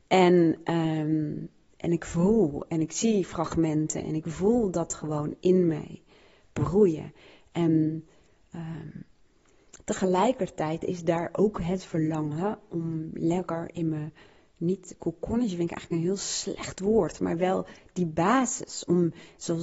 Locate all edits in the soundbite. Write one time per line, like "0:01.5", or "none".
none